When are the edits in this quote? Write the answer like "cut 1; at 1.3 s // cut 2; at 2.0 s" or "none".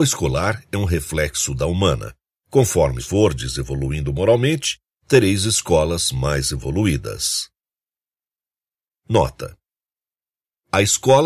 cut 1; at 2.3 s

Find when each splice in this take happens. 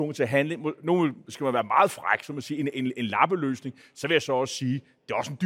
none

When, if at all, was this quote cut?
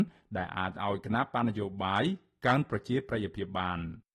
none

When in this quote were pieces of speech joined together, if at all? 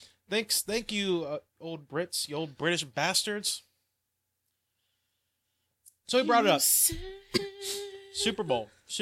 none

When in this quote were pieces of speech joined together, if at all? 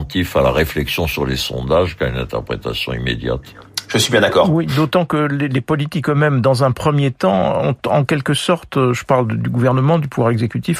none

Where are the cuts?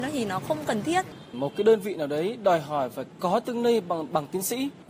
none

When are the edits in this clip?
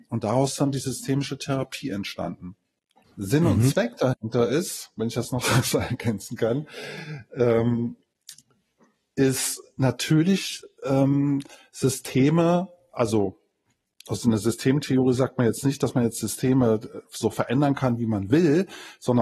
cut 1; at 3.0 s

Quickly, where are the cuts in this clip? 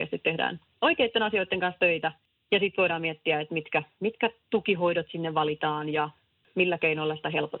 none

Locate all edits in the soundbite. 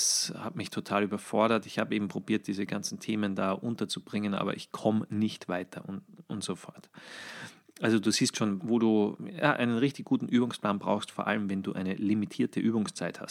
cut 1; at 8.6 s

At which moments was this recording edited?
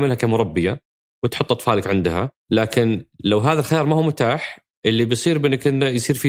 cut 1; at 2.4 s

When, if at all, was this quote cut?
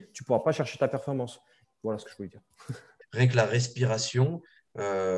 cut 1; at 1.6 s // cut 2; at 3.0 s

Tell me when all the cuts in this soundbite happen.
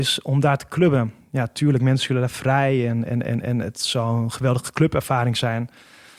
none

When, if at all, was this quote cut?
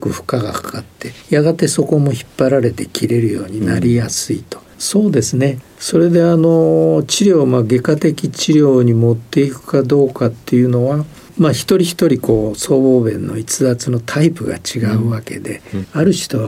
cut 1; at 4.7 s

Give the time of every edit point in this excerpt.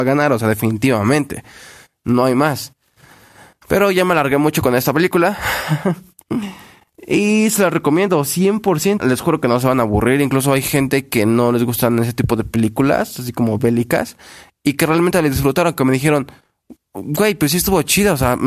cut 1; at 9.0 s

